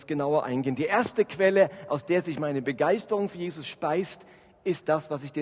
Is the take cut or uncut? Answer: uncut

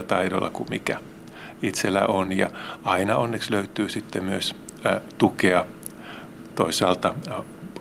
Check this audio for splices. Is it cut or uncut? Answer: uncut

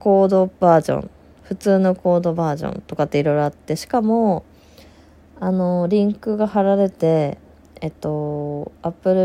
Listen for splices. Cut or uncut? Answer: cut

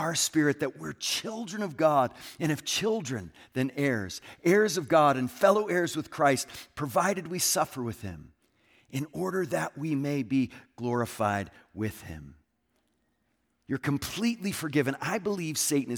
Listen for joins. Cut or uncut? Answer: uncut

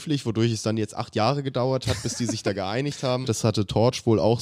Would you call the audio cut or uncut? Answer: cut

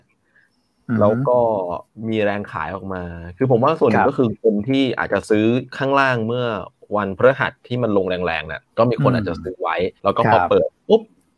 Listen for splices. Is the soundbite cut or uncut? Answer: cut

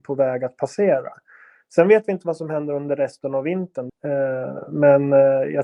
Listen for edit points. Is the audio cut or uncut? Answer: cut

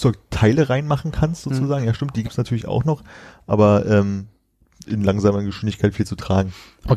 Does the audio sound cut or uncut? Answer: cut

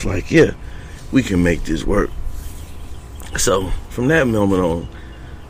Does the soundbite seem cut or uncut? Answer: uncut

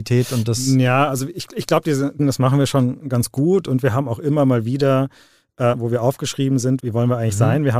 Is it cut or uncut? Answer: cut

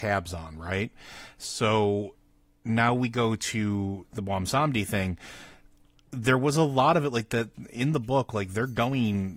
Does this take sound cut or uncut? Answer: uncut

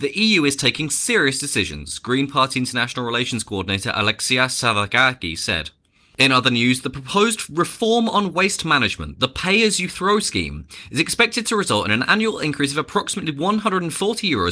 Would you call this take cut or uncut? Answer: uncut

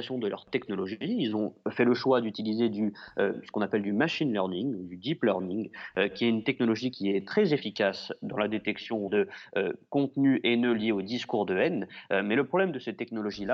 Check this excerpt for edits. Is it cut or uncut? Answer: cut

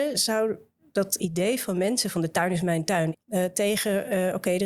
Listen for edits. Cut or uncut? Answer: cut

